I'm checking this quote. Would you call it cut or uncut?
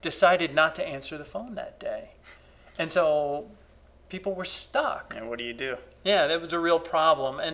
uncut